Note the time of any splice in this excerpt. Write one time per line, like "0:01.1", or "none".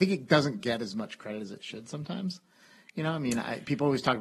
none